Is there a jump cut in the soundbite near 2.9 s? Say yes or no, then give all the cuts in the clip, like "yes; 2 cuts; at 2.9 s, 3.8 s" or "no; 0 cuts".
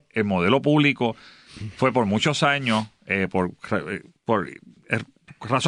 no; 0 cuts